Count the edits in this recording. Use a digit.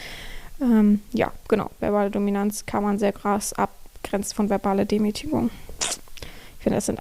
1